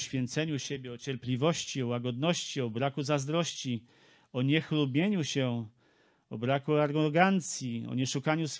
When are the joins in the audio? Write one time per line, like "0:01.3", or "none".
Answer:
none